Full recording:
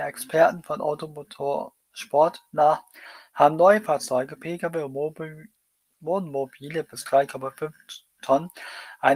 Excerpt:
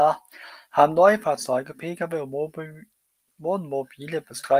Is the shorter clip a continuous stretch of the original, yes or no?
yes